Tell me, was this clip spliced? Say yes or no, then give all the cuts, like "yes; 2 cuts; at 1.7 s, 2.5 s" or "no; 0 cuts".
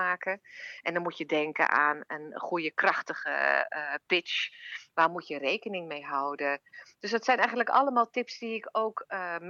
yes; 1 cut; at 4.9 s